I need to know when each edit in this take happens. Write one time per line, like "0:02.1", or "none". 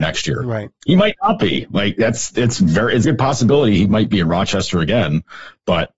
0:03.0